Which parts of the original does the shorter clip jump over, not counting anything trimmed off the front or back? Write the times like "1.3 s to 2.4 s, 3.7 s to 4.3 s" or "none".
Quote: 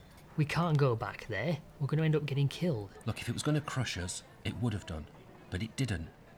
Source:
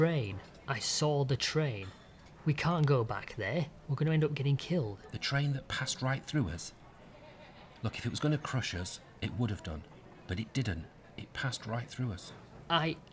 5.1 s to 7.8 s